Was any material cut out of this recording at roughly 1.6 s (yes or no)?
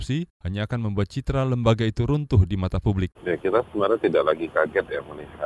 no